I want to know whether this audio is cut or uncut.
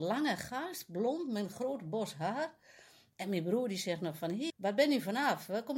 cut